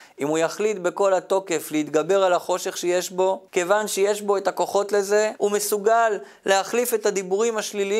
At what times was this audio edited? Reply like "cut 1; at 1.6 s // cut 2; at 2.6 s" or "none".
cut 1; at 3.5 s // cut 2; at 5.4 s

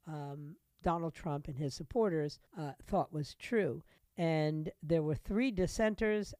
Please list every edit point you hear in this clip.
cut 1; at 2.5 s // cut 2; at 4.0 s

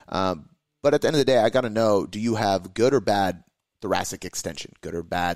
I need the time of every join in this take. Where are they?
none

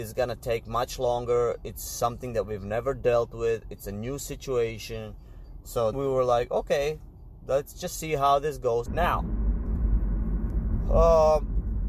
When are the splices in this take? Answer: cut 1; at 5.9 s // cut 2; at 8.9 s

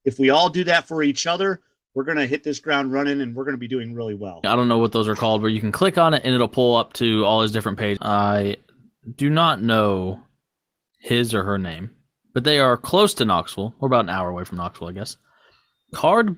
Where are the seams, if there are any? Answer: cut 1; at 4.4 s // cut 2; at 8.0 s

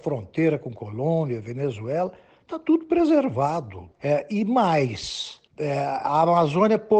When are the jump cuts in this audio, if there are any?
cut 1; at 3.9 s // cut 2; at 5.5 s

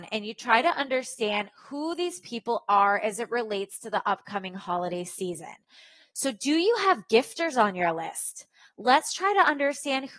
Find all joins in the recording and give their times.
none

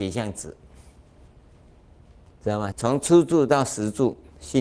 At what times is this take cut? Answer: cut 1; at 2.7 s

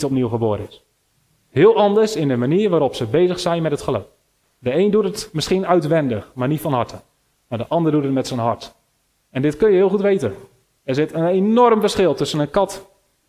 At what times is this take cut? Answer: cut 1; at 4.4 s // cut 2; at 9.3 s

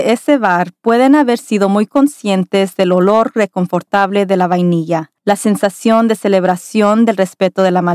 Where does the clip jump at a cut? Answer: cut 1; at 5.2 s

